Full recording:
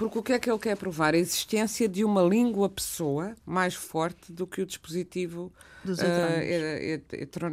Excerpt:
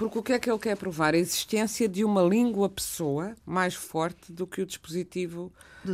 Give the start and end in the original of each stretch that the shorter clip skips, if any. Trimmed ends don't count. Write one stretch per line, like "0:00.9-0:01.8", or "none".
none